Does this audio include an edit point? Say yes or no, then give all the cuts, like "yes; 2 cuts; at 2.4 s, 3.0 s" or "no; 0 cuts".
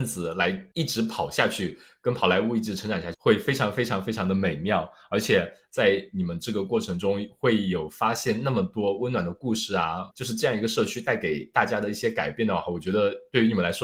yes; 2 cuts; at 3.1 s, 10.1 s